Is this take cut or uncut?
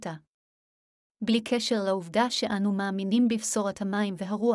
cut